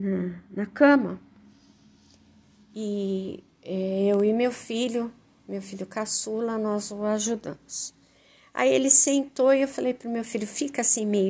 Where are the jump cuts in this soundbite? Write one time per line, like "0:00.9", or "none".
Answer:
none